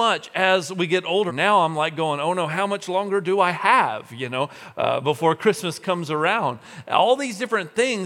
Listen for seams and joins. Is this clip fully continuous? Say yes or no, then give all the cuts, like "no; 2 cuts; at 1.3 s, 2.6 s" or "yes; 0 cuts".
no; 1 cut; at 1.3 s